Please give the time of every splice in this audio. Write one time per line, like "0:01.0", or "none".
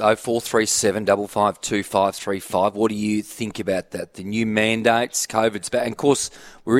none